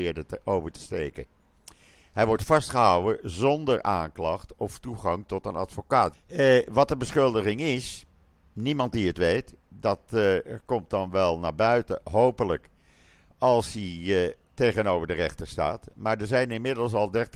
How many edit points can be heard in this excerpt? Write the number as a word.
one